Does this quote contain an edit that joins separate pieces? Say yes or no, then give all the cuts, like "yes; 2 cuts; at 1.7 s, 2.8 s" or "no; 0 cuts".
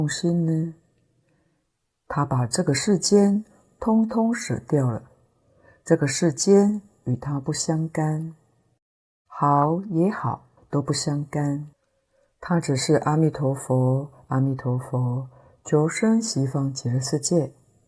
yes; 1 cut; at 10.6 s